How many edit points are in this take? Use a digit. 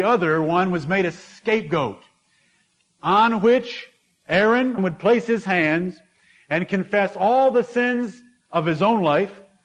1